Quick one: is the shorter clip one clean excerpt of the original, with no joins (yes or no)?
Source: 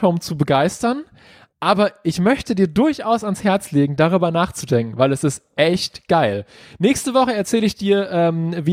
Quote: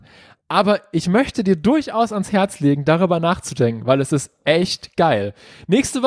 yes